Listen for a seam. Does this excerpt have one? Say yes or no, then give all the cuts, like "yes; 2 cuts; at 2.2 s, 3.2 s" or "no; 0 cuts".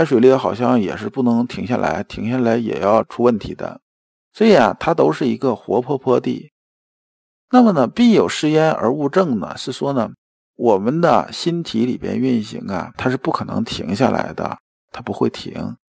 no; 0 cuts